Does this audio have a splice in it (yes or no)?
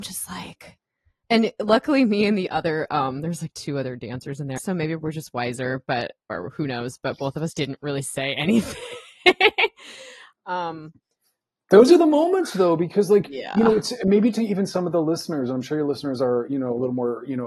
yes